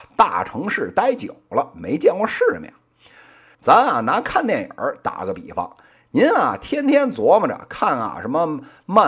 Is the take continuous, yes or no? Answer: no